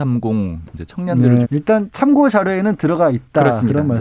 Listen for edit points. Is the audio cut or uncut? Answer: cut